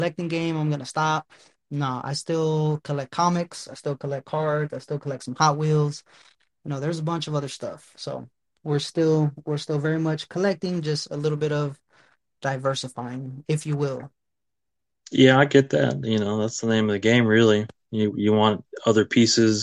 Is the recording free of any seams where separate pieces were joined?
yes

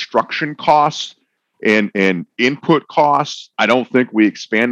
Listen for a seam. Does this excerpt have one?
yes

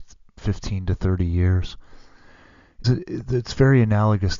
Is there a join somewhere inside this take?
yes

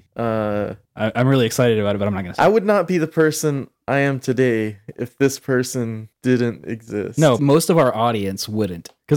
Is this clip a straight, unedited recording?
no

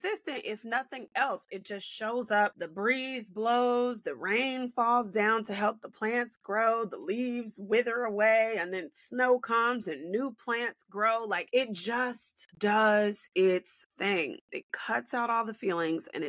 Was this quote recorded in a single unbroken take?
yes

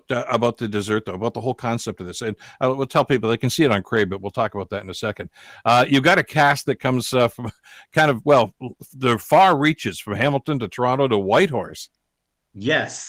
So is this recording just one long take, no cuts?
yes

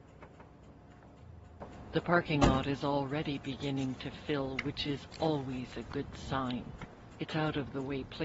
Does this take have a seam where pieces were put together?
no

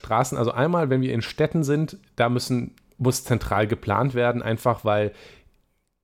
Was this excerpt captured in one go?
yes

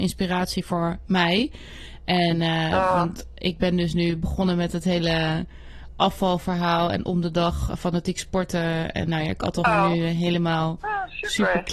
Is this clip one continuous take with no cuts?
no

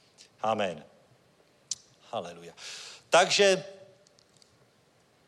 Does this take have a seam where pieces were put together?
no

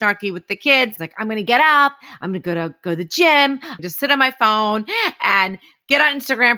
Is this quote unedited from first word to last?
no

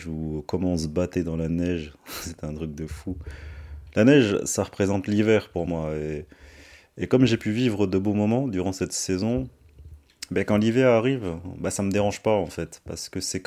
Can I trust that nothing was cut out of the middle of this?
yes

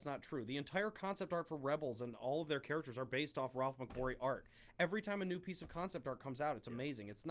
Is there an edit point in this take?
no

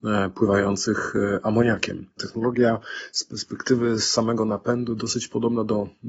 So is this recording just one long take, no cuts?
no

